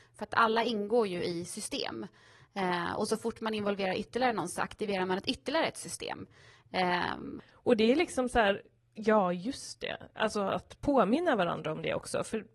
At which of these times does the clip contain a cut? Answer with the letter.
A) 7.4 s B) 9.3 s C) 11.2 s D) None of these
A